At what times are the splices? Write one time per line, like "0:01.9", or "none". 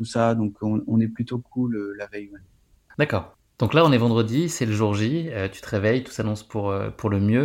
none